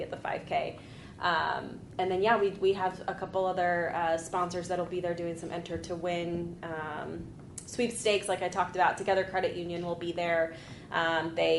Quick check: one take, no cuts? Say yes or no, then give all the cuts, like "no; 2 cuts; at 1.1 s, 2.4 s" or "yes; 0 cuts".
yes; 0 cuts